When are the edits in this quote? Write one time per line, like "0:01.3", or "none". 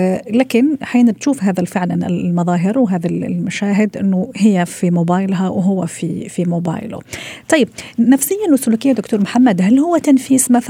0:06.3